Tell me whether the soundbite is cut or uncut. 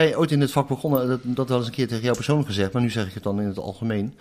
uncut